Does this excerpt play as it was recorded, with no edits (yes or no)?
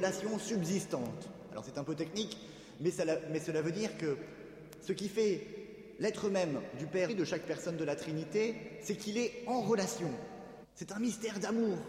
no